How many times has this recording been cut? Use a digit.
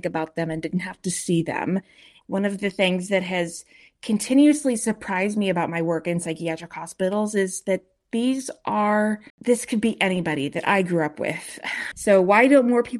3